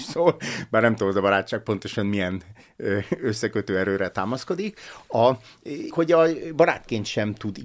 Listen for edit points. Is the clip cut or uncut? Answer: cut